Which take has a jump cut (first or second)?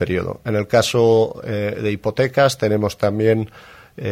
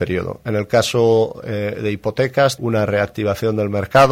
second